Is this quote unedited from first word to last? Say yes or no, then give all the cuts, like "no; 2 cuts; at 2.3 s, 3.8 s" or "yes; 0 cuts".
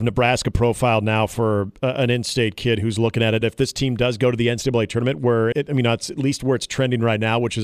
no; 2 cuts; at 3.4 s, 5.5 s